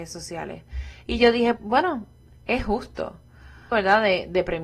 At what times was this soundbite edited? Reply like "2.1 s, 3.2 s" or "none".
1.6 s, 3.7 s